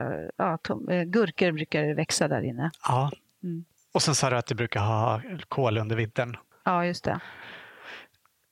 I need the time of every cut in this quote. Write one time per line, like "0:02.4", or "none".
none